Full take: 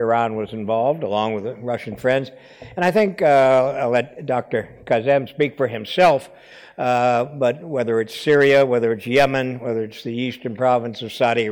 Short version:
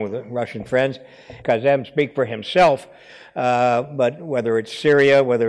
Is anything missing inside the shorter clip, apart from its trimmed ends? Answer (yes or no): yes